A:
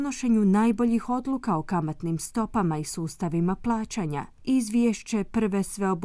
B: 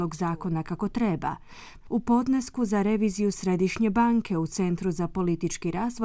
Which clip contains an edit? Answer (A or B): B